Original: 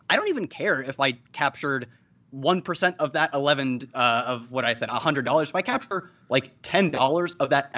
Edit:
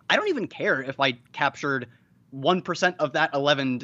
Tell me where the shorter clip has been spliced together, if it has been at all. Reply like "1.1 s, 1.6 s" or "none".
none